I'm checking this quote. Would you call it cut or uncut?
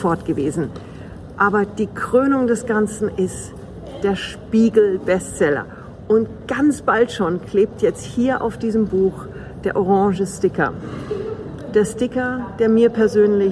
uncut